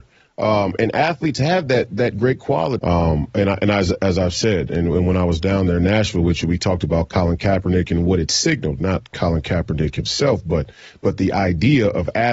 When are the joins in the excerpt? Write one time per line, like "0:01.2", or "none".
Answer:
0:02.8